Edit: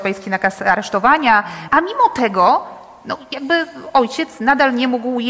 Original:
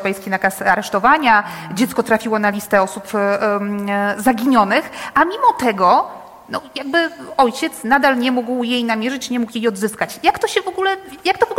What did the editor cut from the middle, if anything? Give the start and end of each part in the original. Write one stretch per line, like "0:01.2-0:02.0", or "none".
0:01.7-0:05.1